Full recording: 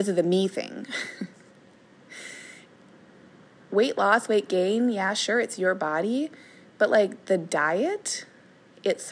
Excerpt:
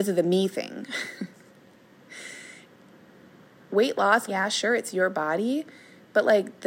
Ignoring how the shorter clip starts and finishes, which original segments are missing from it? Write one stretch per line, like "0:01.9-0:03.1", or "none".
0:04.3-0:04.9